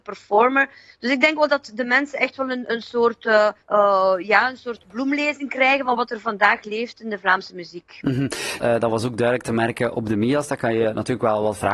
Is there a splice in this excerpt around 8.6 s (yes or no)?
yes